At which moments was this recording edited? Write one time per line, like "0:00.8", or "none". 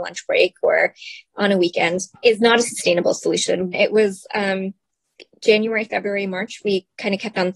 0:03.7